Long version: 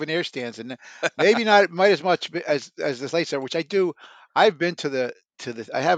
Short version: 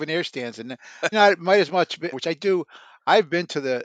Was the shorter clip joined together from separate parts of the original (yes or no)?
yes